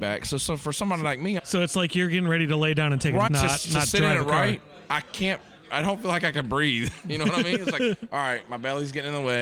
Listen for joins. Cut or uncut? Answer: cut